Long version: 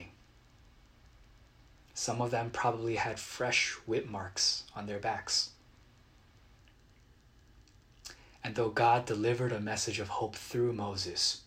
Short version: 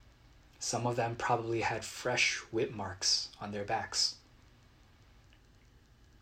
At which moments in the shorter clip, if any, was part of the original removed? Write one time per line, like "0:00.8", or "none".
none